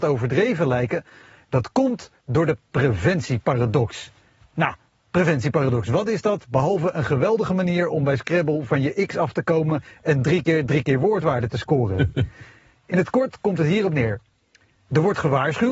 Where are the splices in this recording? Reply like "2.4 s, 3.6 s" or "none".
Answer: none